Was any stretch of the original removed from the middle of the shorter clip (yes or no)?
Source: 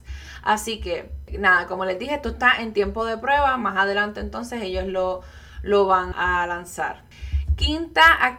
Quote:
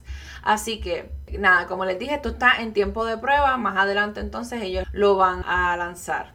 yes